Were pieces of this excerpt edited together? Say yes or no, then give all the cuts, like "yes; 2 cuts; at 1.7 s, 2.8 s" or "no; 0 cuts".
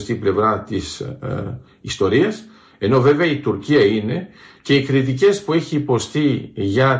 no; 0 cuts